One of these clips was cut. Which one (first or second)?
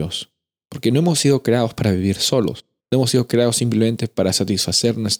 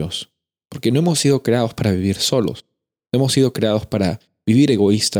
first